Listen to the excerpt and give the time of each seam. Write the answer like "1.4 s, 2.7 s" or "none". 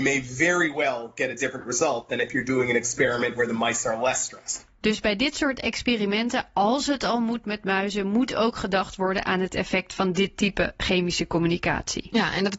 none